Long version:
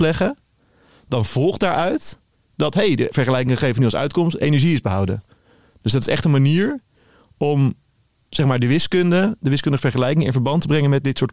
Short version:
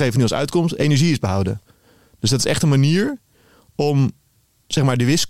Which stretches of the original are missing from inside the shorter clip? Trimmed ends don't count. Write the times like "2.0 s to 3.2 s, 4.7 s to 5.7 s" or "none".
none